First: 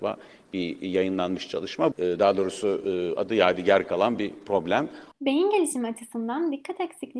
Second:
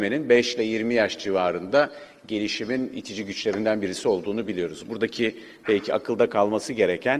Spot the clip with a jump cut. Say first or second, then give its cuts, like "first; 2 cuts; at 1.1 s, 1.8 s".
first; 2 cuts; at 1.9 s, 5.1 s